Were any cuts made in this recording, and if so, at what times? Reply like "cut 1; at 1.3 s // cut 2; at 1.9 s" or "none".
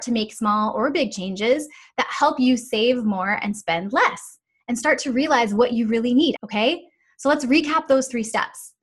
cut 1; at 6.3 s